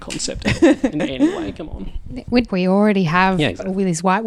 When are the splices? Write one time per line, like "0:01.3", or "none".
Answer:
0:02.5